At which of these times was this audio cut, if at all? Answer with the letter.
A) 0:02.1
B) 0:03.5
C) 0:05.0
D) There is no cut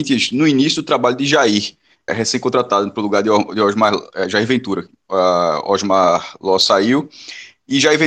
A